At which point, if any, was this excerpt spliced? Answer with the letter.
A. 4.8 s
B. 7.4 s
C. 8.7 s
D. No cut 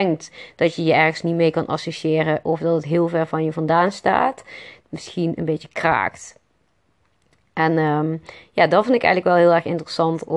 A